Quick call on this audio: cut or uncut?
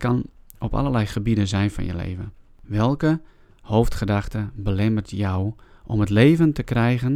uncut